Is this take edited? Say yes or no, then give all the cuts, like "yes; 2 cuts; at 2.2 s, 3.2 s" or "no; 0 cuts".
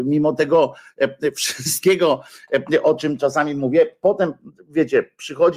no; 0 cuts